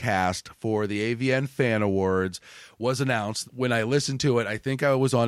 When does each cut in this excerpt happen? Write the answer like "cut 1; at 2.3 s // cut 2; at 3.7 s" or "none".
cut 1; at 3.4 s